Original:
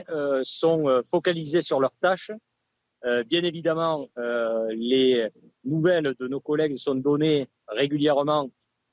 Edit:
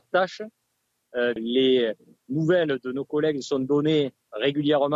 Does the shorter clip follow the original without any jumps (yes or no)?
no